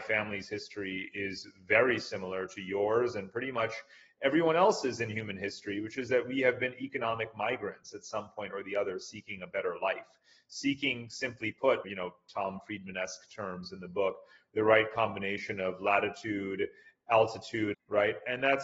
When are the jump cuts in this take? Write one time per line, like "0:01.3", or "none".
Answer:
0:11.8
0:17.7